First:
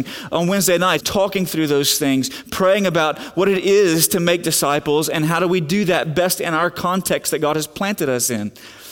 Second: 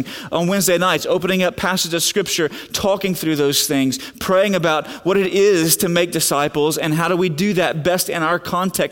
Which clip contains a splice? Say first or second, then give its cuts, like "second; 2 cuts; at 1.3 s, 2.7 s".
first; 1 cut; at 1.0 s